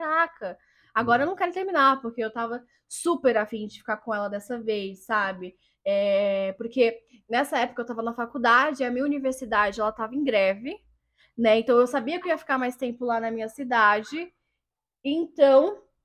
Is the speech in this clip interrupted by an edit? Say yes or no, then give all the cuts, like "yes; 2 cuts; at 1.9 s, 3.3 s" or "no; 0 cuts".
no; 0 cuts